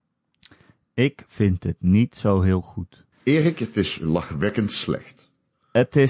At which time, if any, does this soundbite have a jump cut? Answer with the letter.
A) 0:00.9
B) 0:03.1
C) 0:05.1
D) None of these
B